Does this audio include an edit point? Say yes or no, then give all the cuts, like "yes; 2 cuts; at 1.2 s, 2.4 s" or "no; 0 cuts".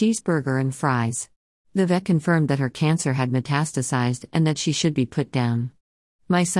yes; 1 cut; at 1.5 s